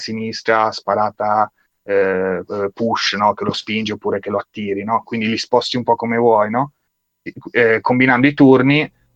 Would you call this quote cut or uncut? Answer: uncut